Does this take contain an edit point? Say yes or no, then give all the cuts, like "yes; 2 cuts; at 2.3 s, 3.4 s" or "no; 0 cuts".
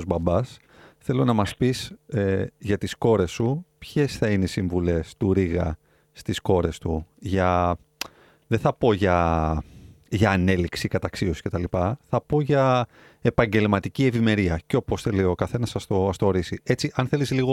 no; 0 cuts